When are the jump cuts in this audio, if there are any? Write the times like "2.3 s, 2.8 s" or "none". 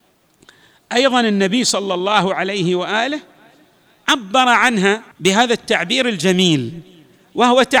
5.1 s